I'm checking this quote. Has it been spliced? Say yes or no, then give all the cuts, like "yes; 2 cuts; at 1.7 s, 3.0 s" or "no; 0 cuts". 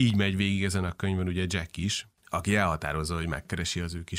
yes; 1 cut; at 2.2 s